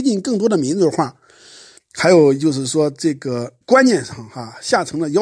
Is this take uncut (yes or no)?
no